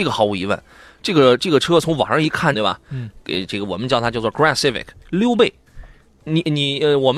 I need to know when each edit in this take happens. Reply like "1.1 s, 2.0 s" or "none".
2.5 s, 5.0 s